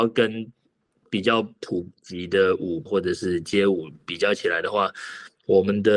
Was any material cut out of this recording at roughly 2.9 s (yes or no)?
yes